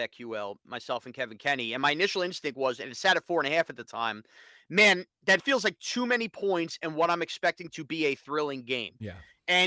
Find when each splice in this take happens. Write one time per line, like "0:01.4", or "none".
0:05.4